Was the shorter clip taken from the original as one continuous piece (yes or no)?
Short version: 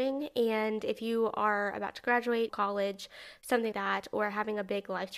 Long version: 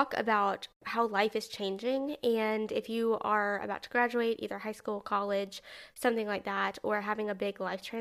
no